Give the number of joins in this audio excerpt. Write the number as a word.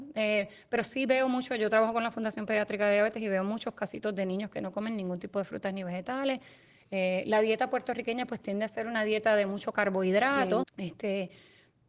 one